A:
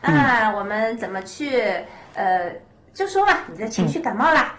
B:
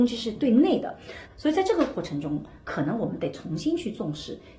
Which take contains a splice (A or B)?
B